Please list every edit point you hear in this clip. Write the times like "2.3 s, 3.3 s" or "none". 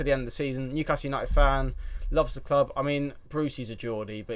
3.3 s